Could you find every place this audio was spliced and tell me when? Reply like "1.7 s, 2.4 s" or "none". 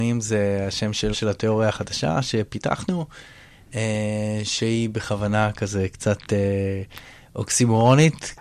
1.1 s

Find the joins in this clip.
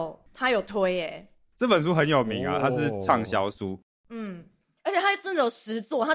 none

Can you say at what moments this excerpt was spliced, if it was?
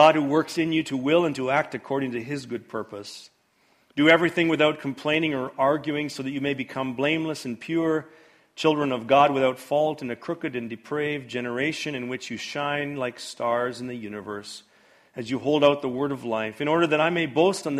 none

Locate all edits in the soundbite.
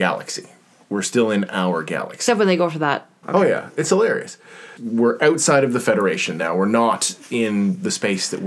3.2 s, 4.8 s

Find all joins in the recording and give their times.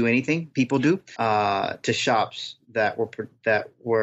1.1 s

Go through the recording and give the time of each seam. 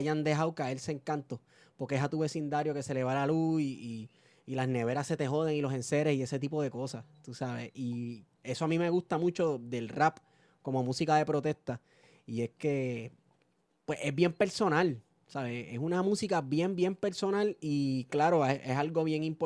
none

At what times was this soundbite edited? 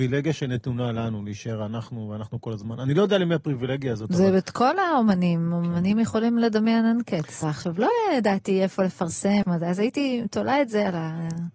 7.4 s, 9.4 s

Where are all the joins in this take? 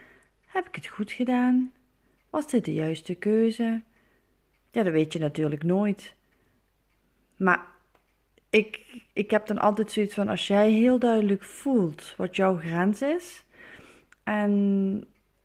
none

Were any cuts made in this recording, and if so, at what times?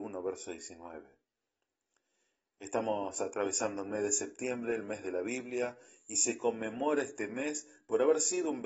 none

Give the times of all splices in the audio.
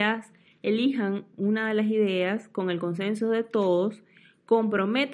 1.3 s

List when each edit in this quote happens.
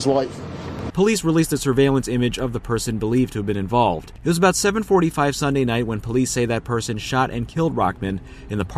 0.9 s

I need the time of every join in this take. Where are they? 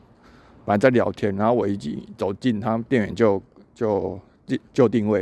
none

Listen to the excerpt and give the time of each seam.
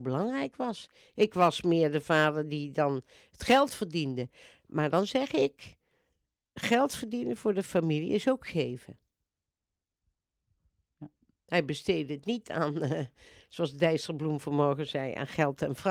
none

